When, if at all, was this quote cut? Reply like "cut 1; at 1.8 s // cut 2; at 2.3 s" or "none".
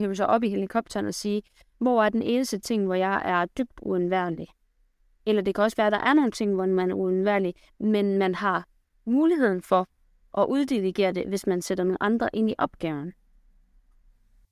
none